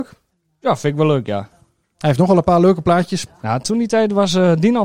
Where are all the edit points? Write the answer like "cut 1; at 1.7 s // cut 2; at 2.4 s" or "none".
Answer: cut 1; at 3.3 s